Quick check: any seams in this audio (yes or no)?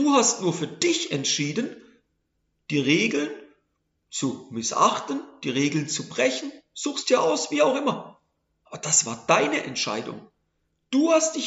no